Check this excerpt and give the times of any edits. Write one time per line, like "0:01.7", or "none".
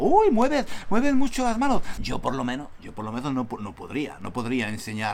0:02.0